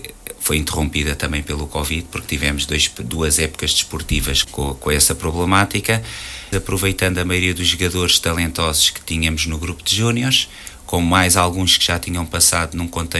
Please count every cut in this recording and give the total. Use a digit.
2